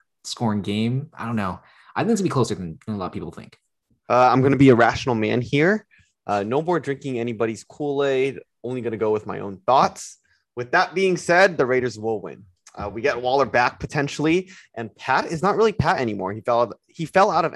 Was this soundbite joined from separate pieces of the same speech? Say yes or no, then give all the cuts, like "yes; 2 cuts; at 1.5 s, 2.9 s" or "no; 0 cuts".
no; 0 cuts